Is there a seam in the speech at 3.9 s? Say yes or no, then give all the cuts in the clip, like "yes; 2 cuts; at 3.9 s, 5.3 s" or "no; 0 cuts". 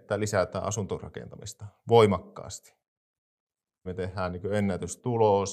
yes; 1 cut; at 3.9 s